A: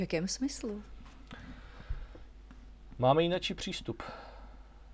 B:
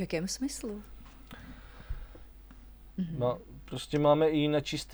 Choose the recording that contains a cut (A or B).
B